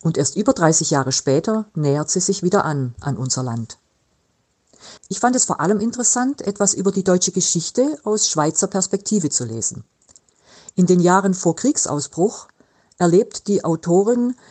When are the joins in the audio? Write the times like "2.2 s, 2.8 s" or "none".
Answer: 5.0 s